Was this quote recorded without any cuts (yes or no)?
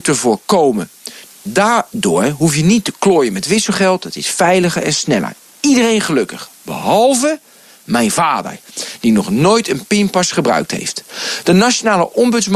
no